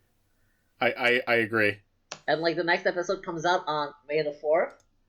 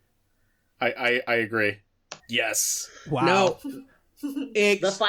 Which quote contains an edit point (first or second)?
second